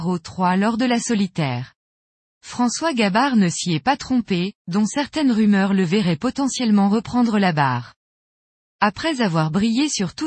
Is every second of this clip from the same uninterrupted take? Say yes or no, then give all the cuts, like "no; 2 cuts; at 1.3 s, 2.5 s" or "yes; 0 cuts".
no; 2 cuts; at 4.6 s, 8.6 s